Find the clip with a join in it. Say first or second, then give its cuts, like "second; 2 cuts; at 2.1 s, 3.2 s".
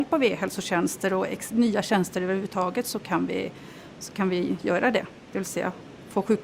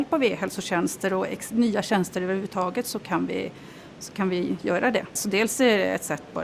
second; 1 cut; at 5.2 s